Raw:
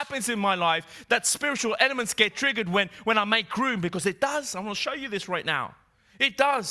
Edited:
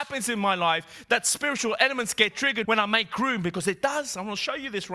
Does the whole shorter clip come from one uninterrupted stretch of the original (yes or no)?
no